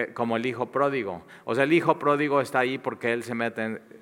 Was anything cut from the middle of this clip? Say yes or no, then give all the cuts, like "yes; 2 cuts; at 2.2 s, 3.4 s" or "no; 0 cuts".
no; 0 cuts